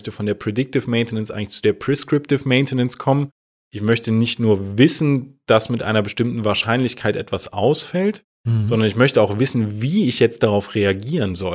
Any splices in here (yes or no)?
no